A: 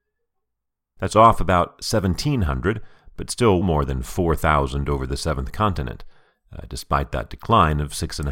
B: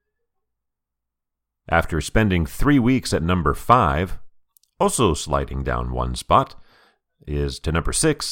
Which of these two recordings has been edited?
A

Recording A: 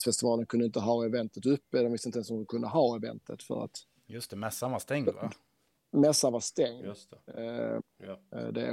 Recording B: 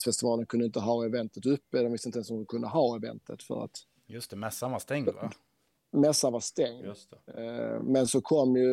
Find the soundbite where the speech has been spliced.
A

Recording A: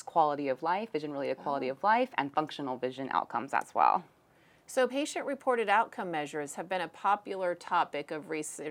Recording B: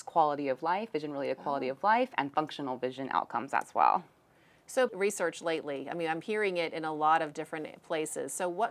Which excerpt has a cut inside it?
B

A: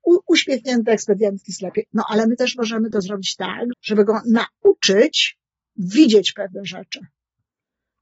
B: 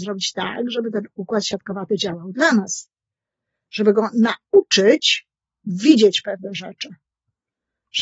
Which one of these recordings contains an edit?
A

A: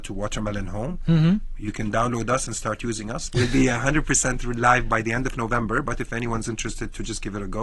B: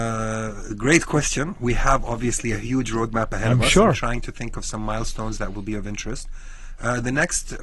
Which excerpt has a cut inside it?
A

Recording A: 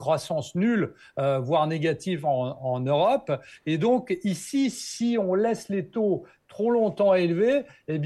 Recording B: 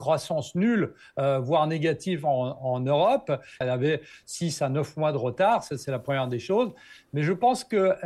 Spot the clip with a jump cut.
B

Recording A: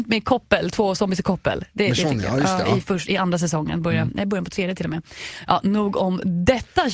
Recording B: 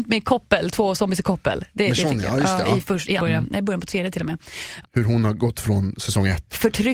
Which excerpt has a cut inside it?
B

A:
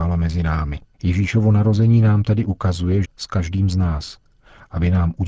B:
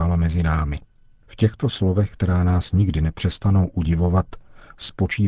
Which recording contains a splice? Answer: A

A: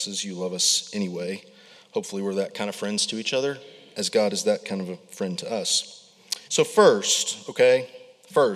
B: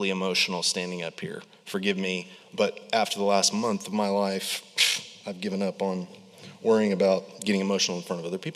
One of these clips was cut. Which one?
A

